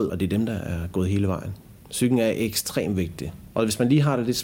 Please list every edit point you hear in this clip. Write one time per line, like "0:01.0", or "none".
0:03.5